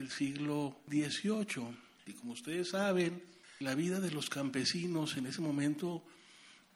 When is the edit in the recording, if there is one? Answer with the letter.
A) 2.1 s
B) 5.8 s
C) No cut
A